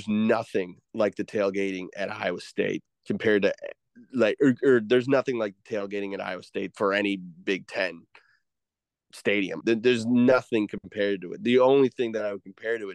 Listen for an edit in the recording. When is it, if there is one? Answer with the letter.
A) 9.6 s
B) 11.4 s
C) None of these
A